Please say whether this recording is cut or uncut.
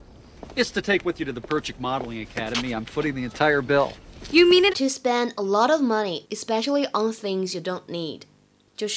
cut